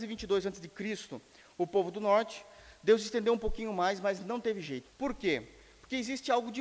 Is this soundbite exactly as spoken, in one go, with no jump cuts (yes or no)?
no